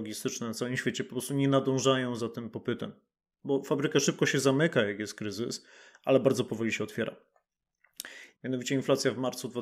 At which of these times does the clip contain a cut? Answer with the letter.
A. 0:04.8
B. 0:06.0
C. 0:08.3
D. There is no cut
C